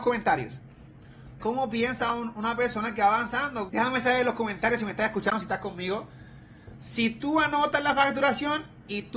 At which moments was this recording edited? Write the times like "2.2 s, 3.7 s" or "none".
1.4 s, 3.7 s, 6.8 s

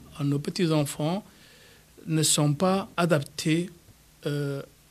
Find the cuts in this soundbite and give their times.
2.9 s

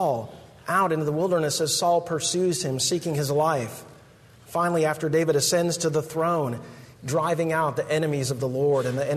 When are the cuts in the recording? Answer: 7.0 s

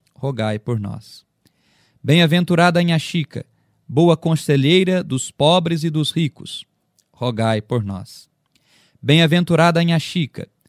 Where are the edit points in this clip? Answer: none

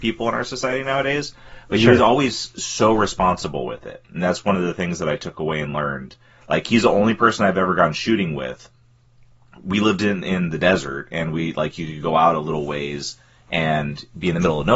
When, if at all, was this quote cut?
none

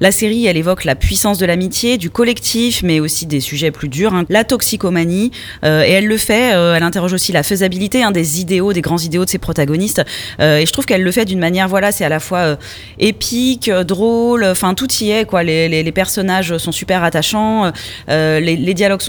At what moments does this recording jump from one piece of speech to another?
4.3 s

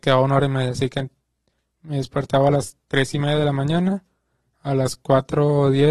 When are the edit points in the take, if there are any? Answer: none

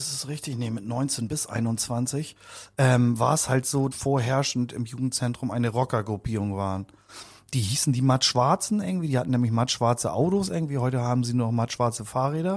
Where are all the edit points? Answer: 3.9 s

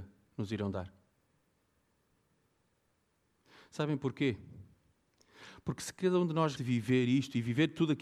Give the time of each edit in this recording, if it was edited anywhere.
6.6 s

